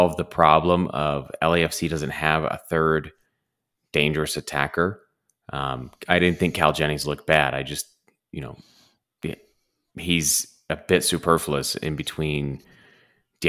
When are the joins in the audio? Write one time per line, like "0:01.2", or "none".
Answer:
none